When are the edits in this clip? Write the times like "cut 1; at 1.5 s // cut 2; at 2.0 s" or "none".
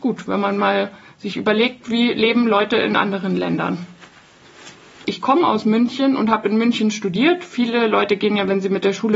cut 1; at 5.0 s